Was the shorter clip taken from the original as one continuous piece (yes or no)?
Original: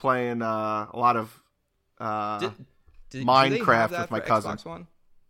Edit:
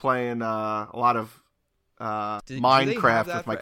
no